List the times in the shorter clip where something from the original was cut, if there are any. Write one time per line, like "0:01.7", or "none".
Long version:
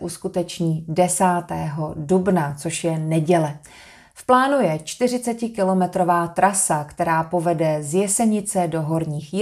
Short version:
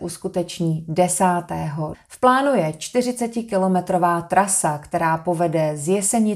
0:01.9